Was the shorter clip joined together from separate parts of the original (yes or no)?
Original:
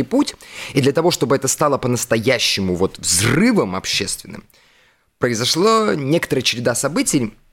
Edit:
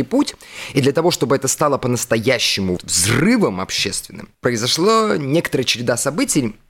yes